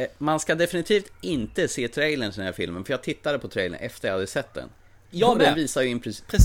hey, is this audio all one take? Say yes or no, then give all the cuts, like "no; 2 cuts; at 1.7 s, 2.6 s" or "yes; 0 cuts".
yes; 0 cuts